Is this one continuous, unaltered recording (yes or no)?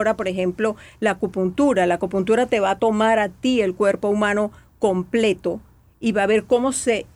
yes